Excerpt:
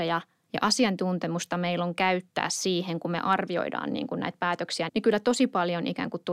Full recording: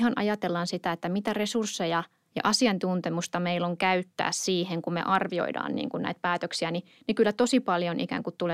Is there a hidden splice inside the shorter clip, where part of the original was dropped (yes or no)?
yes